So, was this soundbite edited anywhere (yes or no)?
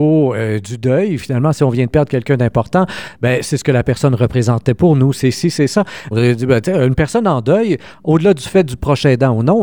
yes